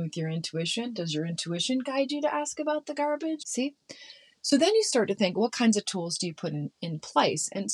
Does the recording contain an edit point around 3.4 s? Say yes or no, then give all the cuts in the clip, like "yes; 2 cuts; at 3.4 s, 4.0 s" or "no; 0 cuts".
yes; 1 cut; at 3.4 s